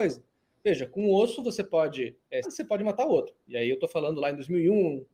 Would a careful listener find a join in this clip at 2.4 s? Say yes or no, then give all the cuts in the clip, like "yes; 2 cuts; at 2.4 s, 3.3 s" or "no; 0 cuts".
yes; 1 cut; at 2.4 s